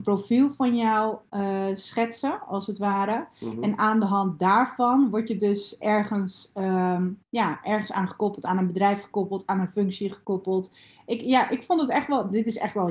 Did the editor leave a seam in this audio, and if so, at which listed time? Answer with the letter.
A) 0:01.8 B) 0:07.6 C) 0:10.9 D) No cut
D